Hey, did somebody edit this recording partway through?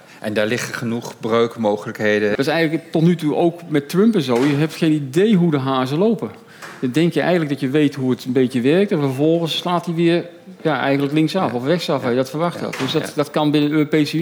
yes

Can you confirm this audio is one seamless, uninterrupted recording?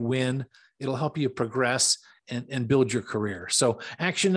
yes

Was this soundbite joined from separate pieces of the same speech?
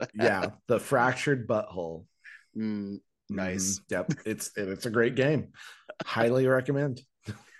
no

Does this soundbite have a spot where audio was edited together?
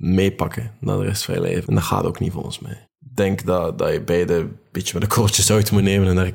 yes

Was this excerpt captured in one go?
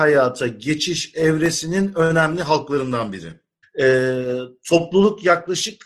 no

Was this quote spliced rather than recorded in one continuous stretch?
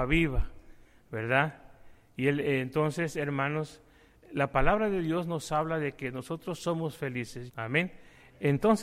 yes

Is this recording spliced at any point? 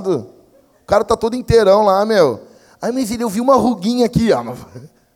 no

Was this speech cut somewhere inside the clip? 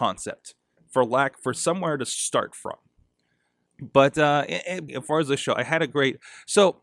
yes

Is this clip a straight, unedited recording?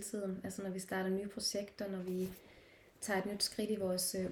yes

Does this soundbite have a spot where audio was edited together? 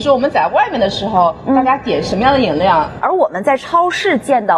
yes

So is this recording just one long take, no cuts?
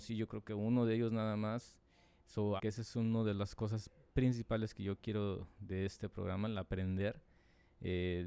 no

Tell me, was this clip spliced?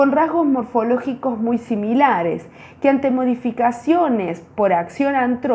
no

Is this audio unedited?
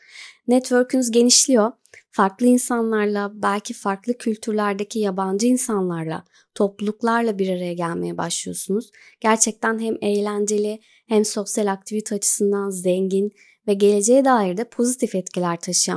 yes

